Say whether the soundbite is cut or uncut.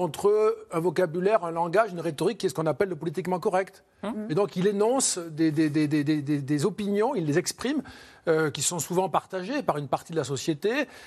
uncut